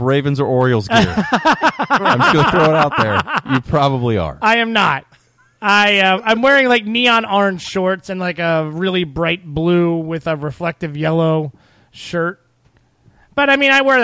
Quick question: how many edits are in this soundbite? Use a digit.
0